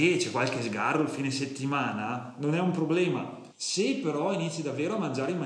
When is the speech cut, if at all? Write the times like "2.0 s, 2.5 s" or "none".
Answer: 3.5 s